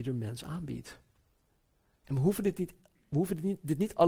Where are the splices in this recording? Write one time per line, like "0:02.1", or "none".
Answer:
0:02.0